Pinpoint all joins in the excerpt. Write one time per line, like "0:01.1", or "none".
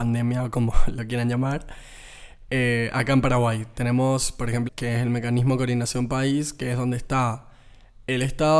0:04.7